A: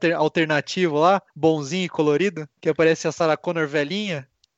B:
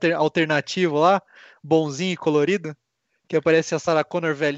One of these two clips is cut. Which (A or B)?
A